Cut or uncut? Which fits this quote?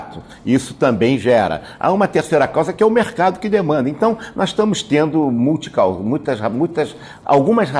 uncut